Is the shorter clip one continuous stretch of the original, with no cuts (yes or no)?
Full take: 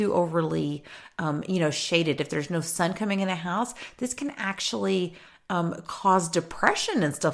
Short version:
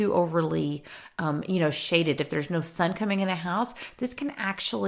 yes